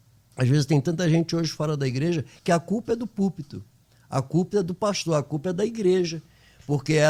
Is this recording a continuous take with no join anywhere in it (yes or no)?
yes